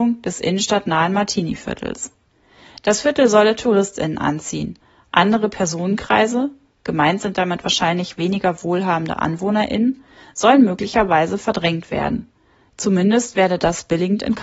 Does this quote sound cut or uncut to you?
uncut